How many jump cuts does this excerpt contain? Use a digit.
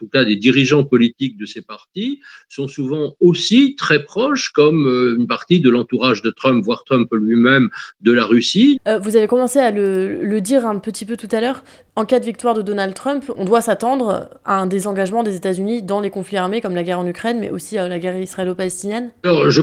2